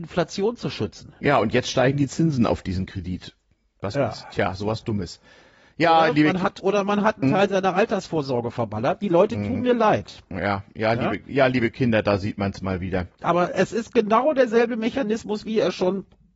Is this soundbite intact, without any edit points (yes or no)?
yes